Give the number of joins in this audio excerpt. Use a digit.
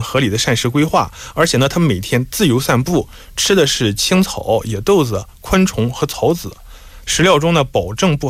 1